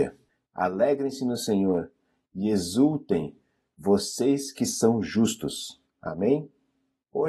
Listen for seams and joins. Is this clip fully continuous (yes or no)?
no